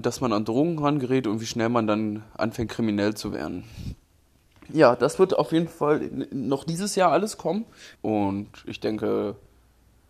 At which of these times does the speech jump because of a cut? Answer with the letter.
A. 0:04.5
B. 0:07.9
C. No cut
B